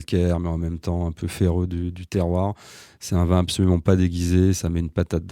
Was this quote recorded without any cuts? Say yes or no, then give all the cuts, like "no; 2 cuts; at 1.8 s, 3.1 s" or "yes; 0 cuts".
yes; 0 cuts